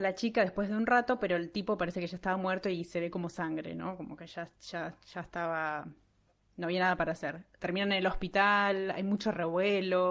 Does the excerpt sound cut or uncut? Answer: uncut